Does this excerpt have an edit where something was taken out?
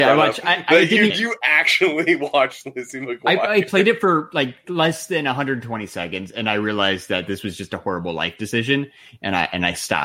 yes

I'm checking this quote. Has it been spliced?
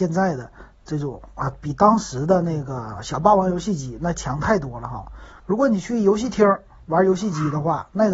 yes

